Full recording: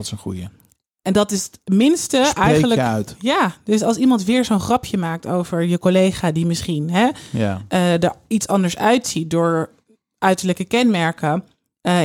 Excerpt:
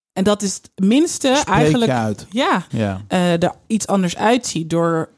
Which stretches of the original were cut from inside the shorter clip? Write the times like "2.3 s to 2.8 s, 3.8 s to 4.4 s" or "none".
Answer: 3.6 s to 7.3 s